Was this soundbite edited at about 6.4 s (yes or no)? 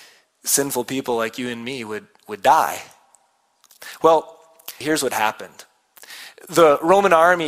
no